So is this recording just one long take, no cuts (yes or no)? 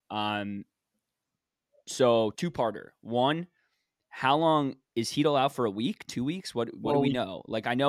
no